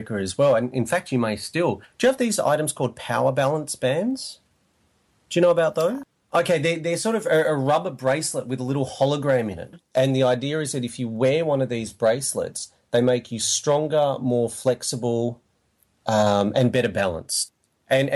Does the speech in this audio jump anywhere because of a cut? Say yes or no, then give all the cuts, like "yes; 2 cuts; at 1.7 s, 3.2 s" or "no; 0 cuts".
no; 0 cuts